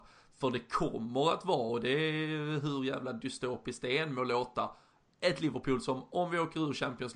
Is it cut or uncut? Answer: uncut